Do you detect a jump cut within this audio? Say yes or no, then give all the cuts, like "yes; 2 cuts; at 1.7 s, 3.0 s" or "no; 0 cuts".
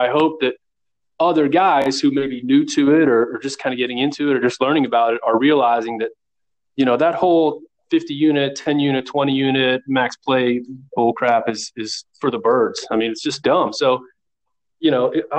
no; 0 cuts